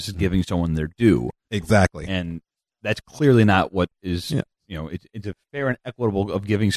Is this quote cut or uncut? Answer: uncut